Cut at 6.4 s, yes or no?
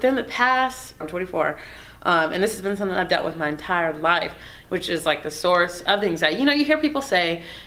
no